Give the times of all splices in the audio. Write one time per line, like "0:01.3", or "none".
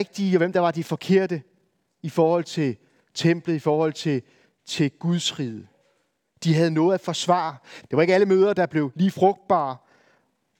0:07.8